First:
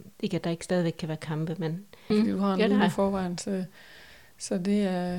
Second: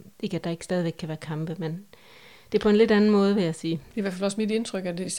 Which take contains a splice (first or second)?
first